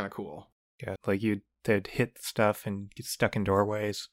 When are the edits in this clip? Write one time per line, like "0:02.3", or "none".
0:01.0